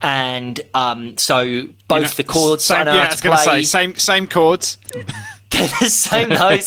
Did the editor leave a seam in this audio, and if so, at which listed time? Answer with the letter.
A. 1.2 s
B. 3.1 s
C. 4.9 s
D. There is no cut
C